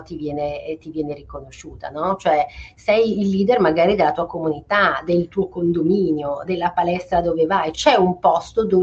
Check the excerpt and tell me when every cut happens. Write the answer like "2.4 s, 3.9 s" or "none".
6.4 s, 7.7 s